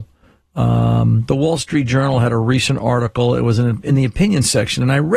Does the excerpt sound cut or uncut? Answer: uncut